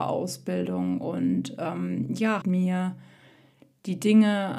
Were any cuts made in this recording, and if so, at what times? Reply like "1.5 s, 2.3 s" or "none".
2.4 s